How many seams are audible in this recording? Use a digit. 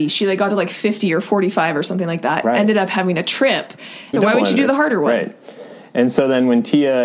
1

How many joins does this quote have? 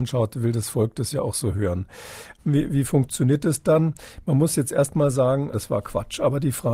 2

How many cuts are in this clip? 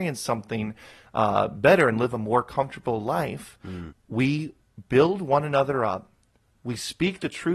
1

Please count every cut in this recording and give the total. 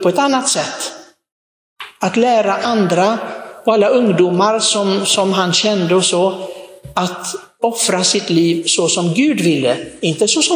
0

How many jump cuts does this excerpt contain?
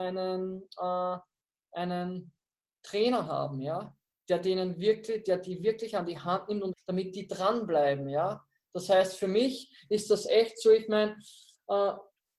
1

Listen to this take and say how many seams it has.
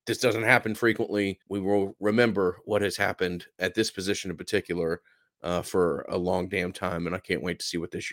1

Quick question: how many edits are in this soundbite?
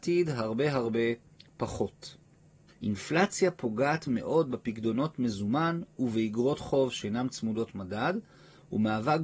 1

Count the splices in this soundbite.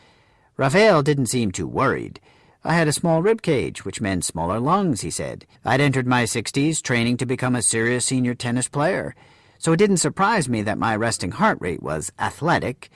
1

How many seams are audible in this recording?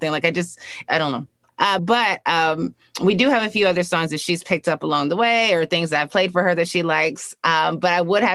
1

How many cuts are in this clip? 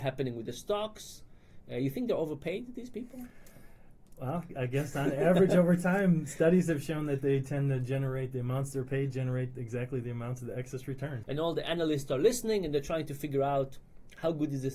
1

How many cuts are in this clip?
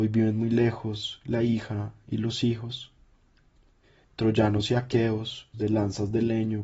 2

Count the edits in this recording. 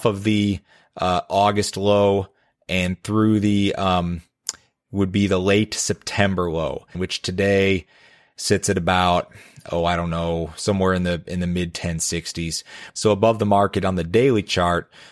2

